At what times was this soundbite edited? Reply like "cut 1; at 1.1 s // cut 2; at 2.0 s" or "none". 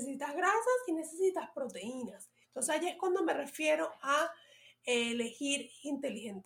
cut 1; at 2.4 s

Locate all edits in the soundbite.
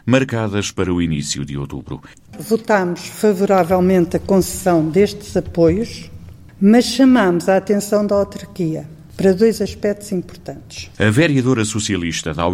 cut 1; at 2.3 s // cut 2; at 10.9 s

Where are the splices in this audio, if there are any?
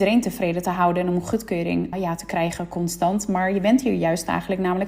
cut 1; at 1.9 s

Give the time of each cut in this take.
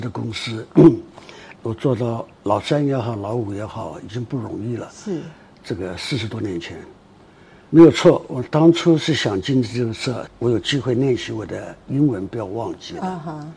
cut 1; at 1.5 s // cut 2; at 7.7 s // cut 3; at 10.3 s

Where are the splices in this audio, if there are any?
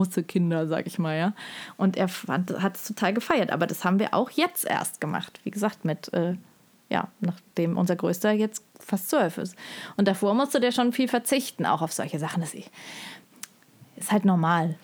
cut 1; at 8.7 s

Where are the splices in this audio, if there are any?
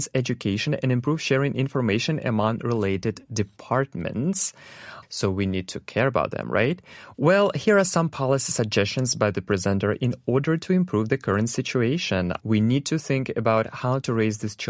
cut 1; at 5.0 s // cut 2; at 7.1 s // cut 3; at 12.4 s

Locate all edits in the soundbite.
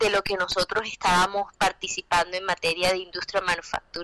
none

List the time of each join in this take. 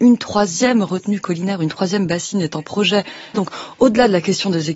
cut 1; at 3.3 s

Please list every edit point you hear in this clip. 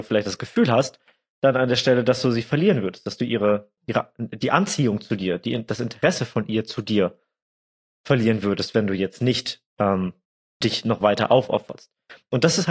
cut 1; at 3.8 s

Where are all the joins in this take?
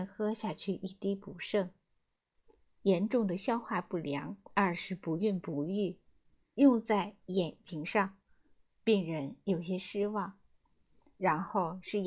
cut 1; at 2.8 s // cut 2; at 6.5 s // cut 3; at 10.7 s

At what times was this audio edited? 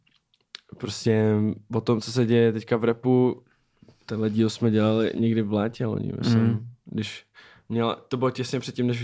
none

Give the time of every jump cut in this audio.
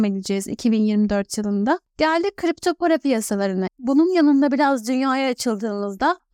cut 1; at 1.8 s // cut 2; at 3.7 s

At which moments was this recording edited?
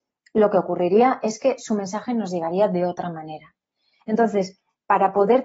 cut 1; at 4.0 s

